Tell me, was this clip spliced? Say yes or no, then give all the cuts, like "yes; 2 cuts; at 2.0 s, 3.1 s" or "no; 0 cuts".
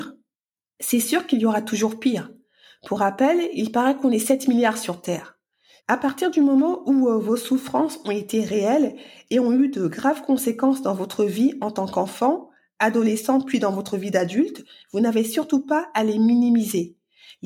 yes; 1 cut; at 5.8 s